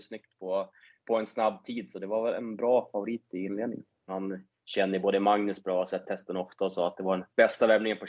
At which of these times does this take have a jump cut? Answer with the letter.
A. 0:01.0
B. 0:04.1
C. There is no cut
B